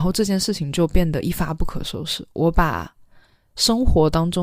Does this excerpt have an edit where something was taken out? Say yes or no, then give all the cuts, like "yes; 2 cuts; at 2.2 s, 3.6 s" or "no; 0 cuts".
no; 0 cuts